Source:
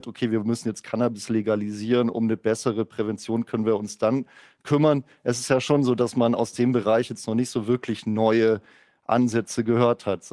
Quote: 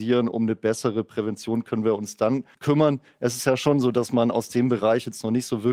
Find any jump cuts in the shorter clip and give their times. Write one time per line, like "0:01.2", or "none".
0:02.5